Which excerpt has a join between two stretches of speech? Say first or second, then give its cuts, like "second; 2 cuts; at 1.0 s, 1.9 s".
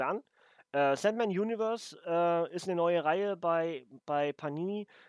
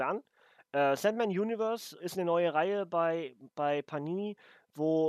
second; 1 cut; at 2.0 s